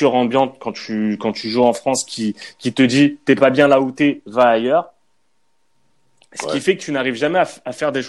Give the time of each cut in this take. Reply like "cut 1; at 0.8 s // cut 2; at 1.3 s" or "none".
none